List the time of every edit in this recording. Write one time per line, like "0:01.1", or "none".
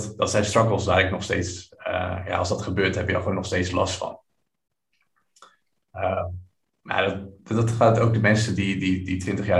none